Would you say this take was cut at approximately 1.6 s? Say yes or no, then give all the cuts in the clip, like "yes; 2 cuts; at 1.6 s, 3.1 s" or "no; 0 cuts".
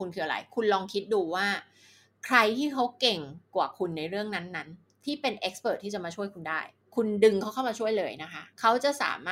no; 0 cuts